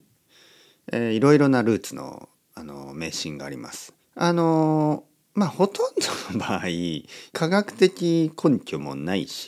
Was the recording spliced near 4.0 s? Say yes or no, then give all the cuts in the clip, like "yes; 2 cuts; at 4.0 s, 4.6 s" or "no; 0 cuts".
yes; 2 cuts; at 4.0 s, 7.3 s